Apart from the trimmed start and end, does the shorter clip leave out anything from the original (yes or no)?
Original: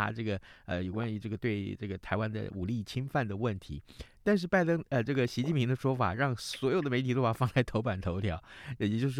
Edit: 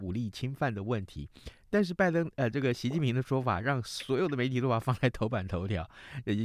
no